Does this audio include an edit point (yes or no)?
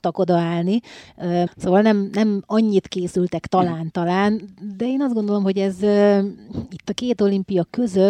yes